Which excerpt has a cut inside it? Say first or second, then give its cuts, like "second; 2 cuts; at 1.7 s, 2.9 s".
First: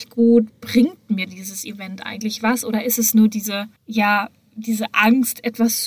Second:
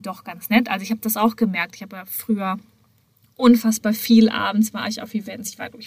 first; 1 cut; at 3.8 s